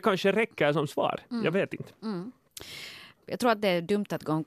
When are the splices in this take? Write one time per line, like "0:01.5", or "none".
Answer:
0:03.2